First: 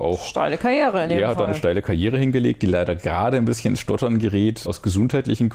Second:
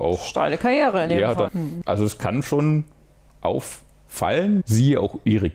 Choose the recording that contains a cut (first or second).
second